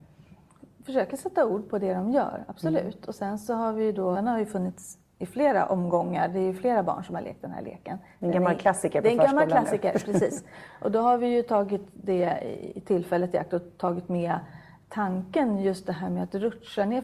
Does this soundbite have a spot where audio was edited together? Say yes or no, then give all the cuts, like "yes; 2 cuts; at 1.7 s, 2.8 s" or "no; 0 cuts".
yes; 1 cut; at 4.1 s